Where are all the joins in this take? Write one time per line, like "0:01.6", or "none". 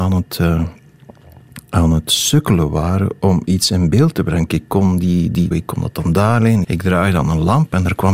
0:04.5
0:05.5
0:06.6